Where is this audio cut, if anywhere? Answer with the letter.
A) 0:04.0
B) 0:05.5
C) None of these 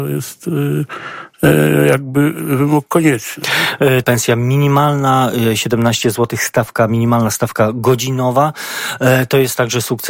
A